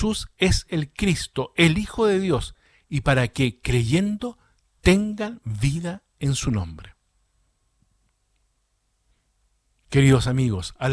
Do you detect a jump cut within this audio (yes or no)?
no